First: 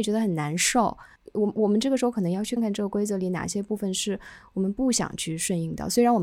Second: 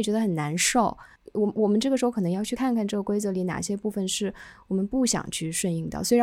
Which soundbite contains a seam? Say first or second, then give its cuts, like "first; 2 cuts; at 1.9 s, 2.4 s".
first; 1 cut; at 2.6 s